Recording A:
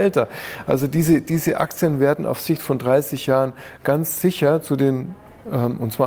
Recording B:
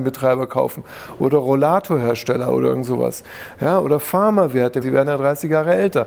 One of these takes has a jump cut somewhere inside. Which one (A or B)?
B